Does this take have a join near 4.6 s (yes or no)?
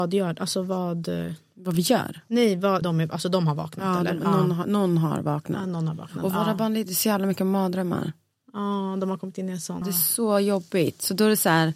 no